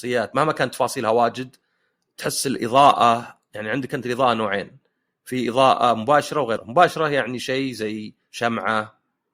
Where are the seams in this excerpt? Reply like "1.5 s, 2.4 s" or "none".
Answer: 6.6 s